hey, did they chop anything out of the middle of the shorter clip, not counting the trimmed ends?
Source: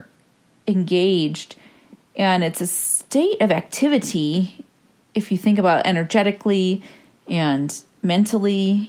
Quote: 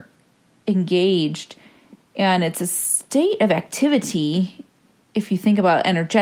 no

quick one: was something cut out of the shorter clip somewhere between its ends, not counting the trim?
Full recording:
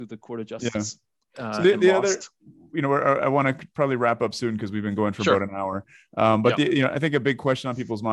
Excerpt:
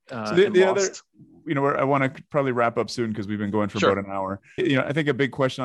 yes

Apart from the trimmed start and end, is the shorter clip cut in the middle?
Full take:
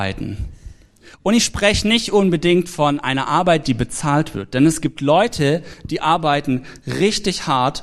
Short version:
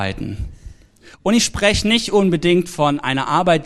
no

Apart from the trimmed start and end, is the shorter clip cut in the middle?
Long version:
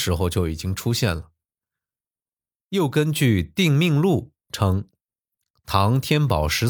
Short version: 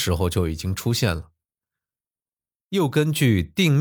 no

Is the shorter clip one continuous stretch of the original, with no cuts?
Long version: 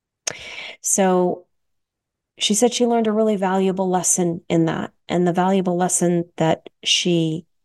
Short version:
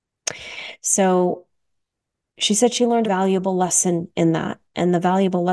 no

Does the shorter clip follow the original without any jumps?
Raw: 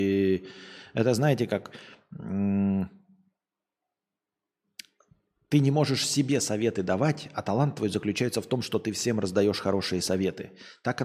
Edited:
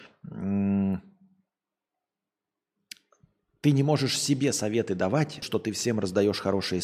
no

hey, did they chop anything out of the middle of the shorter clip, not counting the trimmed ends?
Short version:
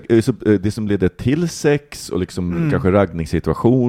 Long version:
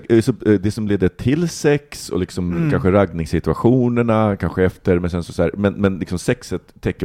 no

